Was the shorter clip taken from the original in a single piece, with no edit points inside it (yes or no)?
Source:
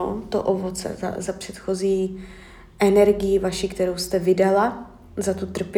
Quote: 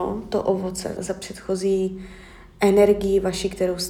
no